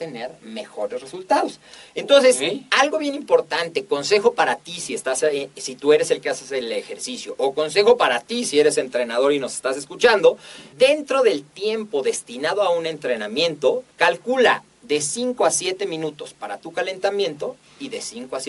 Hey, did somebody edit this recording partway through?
yes; 2 cuts; at 10.7 s, 13.9 s

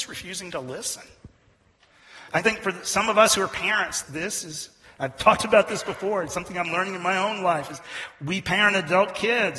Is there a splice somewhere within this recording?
yes; 3 cuts; at 2.3 s, 4.0 s, 7.7 s

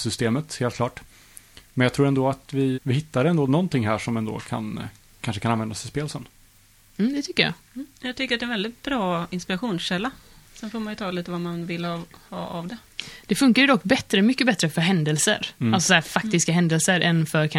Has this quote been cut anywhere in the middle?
yes; 2 cuts; at 2.7 s, 15.5 s

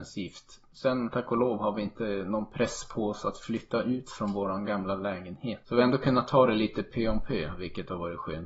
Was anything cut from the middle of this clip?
yes; 1 cut; at 5.6 s

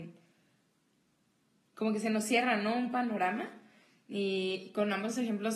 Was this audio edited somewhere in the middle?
no; 0 cuts

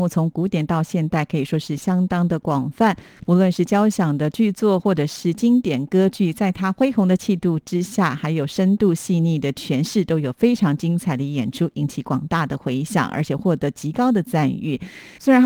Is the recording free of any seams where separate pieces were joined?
yes; 0 cuts

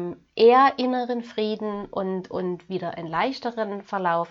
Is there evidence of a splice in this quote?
no; 0 cuts

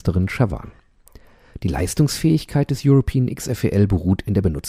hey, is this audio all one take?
yes; 0 cuts

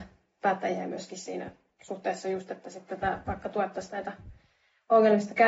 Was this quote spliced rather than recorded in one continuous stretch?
no; 0 cuts

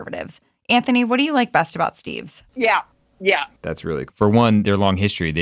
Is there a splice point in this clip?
yes; 2 cuts; at 2.5 s, 4.1 s

